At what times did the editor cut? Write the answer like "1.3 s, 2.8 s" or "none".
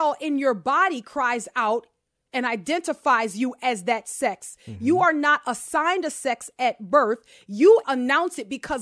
7.8 s